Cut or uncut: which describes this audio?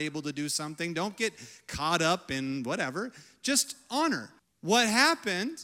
cut